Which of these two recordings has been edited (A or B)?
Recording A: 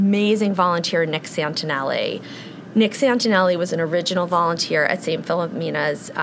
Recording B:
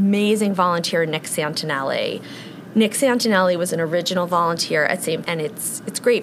B